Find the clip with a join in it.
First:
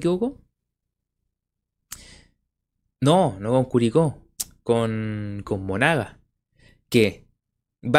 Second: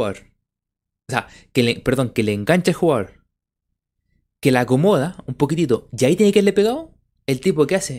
first; 1 cut; at 5.4 s

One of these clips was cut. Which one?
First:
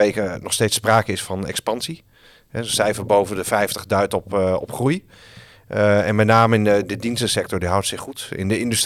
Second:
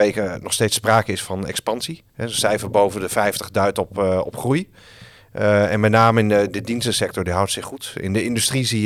second; 1 cut; at 2.1 s

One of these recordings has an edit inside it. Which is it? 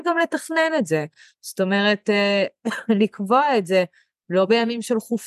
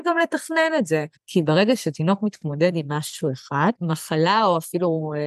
second; 2 cuts; at 1.1 s, 3.7 s

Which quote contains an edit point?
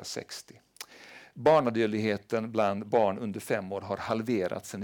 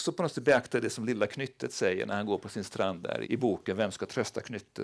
second; 1 cut; at 3.2 s

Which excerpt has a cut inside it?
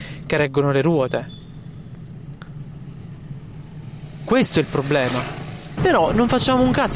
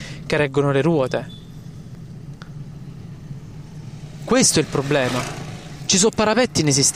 first; 1 cut; at 5.8 s

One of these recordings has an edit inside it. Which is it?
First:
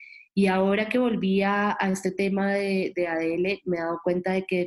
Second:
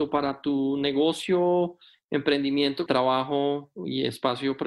second; 1 cut; at 2.9 s

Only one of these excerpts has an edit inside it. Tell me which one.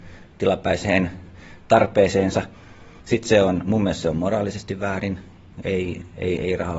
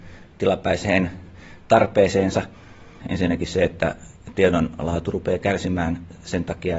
second; 1 cut; at 3.0 s

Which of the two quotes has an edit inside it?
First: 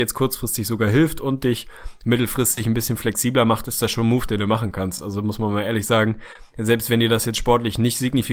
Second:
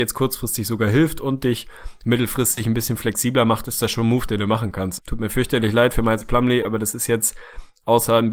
second; 1 cut; at 5.0 s

